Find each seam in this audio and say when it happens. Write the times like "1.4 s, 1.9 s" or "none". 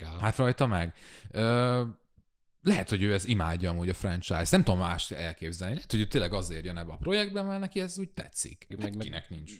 8.7 s